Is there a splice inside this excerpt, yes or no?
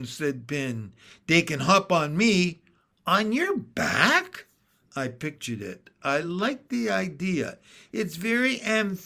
no